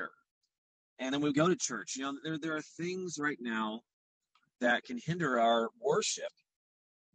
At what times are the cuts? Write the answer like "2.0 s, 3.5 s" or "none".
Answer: none